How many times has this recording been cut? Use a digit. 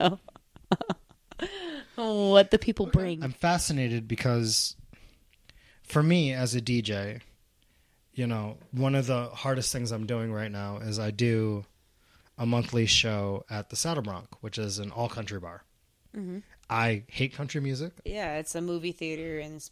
1